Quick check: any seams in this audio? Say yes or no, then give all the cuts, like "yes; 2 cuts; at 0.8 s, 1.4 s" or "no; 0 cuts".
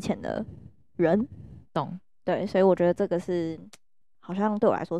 no; 0 cuts